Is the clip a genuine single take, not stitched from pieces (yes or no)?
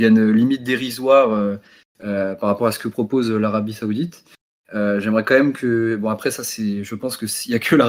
yes